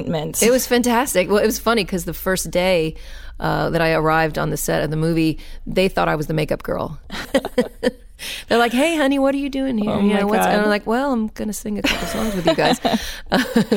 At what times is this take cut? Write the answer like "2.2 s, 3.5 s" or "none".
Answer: 7.2 s